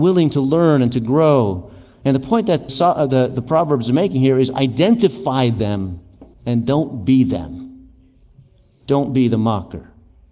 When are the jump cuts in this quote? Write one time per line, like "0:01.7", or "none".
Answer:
0:02.7
0:06.3